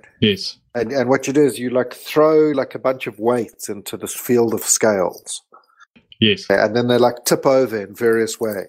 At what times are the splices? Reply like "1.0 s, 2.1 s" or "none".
none